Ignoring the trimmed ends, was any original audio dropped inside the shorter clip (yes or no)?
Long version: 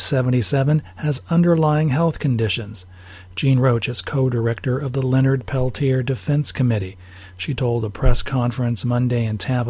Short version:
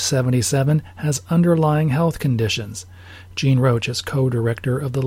no